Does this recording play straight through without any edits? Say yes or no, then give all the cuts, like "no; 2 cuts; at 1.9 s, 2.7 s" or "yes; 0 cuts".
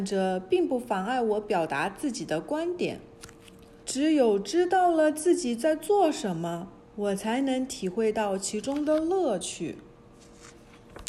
no; 1 cut; at 3.8 s